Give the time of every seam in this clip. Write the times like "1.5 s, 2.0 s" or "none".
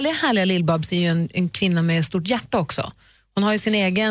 none